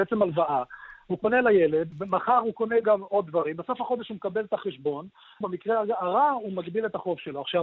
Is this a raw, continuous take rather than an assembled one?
no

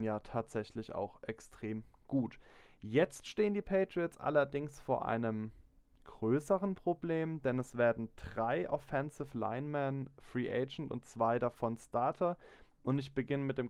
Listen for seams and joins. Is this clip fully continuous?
yes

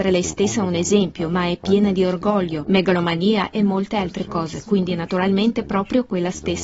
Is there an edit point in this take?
no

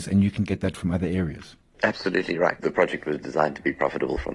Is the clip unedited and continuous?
no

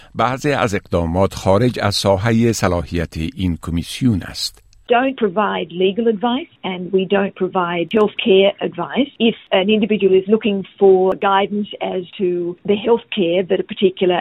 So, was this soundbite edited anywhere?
no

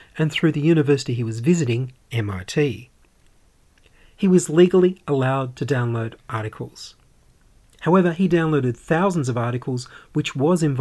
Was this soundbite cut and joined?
no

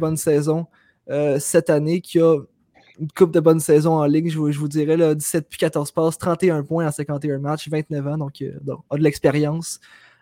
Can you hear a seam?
no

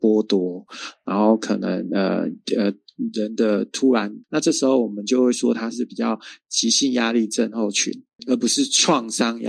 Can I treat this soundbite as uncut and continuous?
no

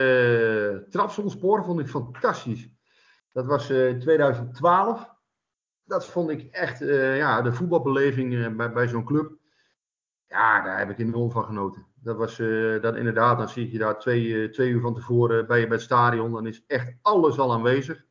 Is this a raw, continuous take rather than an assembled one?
yes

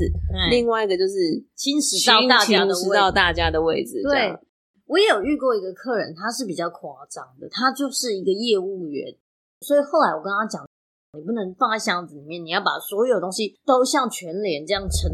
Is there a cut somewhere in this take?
yes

